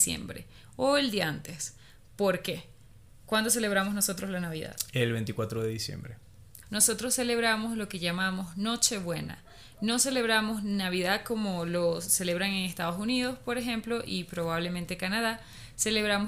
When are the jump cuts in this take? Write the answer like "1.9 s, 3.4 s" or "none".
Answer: 6.6 s